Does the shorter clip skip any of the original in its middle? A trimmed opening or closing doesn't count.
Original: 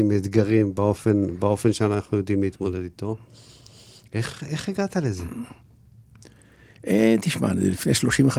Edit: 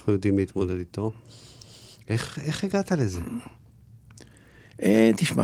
no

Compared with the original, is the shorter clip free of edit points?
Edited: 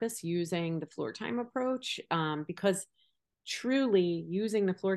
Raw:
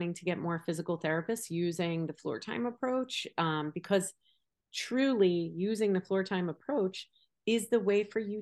yes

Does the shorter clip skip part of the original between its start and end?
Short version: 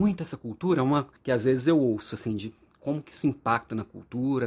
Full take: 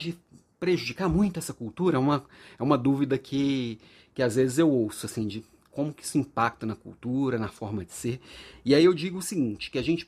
yes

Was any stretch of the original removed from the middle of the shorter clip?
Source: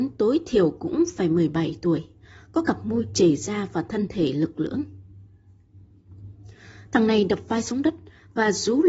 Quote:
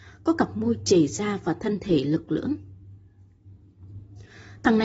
no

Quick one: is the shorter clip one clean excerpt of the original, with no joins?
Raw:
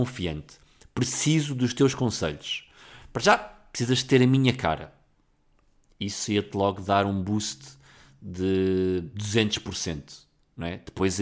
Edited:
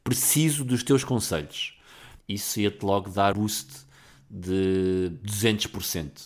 no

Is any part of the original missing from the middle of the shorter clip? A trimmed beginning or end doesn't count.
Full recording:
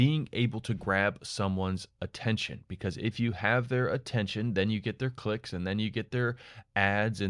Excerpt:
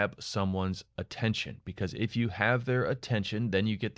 no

